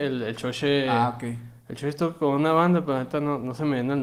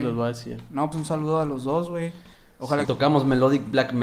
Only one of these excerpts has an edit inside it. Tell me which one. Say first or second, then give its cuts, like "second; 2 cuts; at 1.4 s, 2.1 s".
second; 2 cuts; at 0.9 s, 2.8 s